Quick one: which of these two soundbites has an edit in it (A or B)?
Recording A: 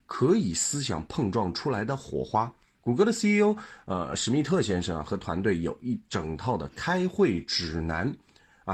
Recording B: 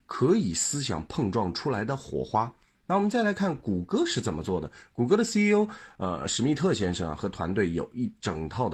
A